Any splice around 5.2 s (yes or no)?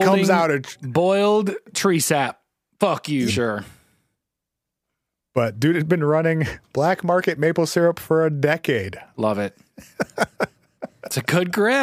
no